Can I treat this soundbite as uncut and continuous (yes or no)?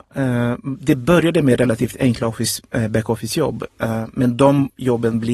yes